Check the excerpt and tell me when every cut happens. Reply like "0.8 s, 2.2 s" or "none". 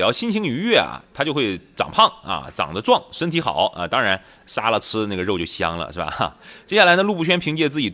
none

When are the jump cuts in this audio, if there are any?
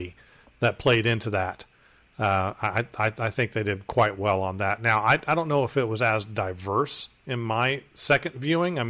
none

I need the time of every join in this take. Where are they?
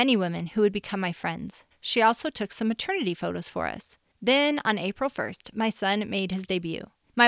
1.7 s, 4.1 s

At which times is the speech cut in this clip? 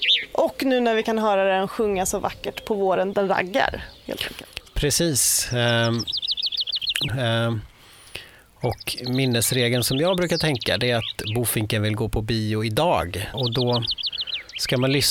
3.1 s, 7.1 s, 13.3 s

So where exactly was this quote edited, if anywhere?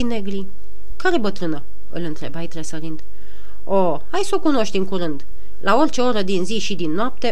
0.9 s

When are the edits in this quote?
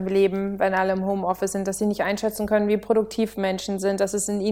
none

